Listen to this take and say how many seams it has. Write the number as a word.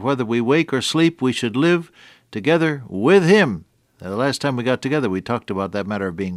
zero